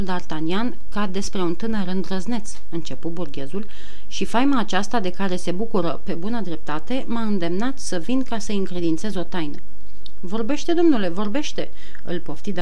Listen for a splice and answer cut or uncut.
uncut